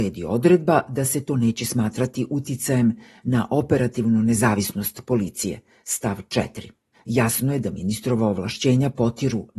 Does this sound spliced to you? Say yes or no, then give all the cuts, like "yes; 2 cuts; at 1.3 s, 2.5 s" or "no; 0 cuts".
yes; 1 cut; at 6.9 s